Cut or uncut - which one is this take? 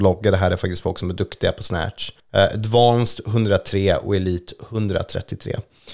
cut